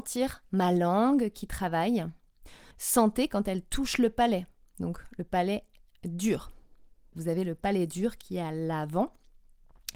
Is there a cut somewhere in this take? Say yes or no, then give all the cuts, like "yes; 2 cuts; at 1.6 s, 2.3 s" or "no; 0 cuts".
yes; 2 cuts; at 2.7 s, 7.1 s